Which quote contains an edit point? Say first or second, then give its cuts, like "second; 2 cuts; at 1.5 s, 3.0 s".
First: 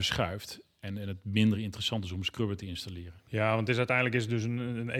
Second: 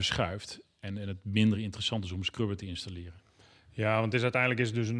first; 1 cut; at 3.3 s